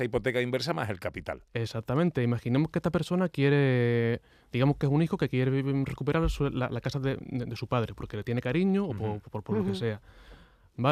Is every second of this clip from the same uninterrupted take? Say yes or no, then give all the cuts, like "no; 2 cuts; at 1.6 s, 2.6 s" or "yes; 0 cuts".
yes; 0 cuts